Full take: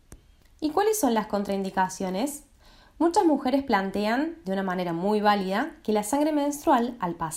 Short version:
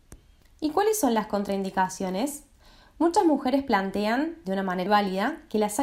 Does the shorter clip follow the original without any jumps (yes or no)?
no